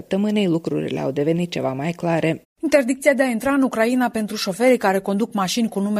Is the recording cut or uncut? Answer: cut